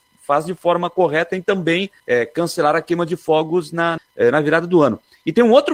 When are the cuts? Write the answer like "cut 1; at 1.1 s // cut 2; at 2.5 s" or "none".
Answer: cut 1; at 2.0 s // cut 2; at 4.0 s

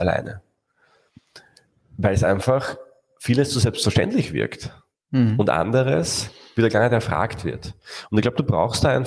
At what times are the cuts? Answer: none

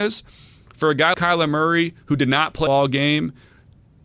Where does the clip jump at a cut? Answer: cut 1; at 1.1 s // cut 2; at 2.7 s

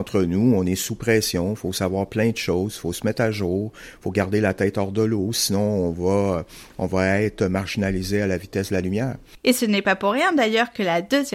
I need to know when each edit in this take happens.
cut 1; at 9.4 s

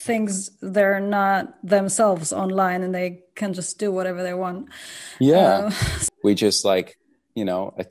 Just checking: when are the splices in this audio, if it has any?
cut 1; at 6.1 s

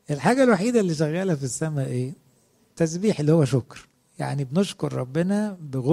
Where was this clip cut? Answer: none

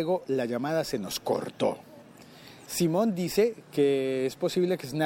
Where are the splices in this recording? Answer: cut 1; at 2.7 s

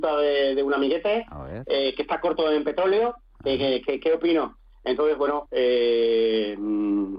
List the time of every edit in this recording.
cut 1; at 5.5 s

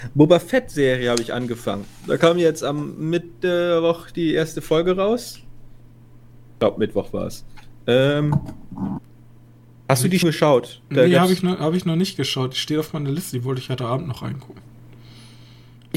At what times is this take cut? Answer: cut 1; at 10.2 s

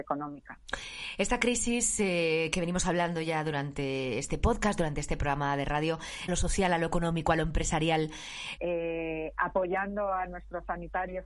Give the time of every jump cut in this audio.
cut 1; at 6.3 s // cut 2; at 8.6 s

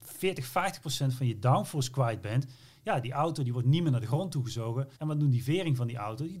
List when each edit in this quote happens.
cut 1; at 5.0 s

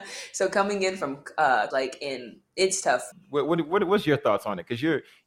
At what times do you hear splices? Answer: cut 1; at 1.7 s // cut 2; at 3.1 s

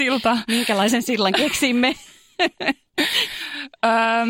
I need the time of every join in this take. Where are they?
none

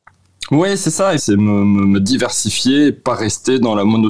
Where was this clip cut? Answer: cut 1; at 1.2 s

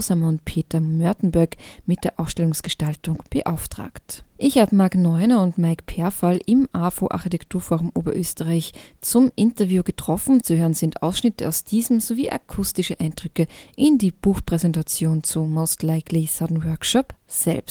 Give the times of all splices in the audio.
cut 1; at 4.3 s

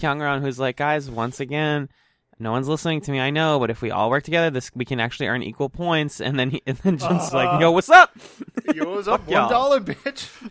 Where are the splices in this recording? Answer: cut 1; at 7.3 s

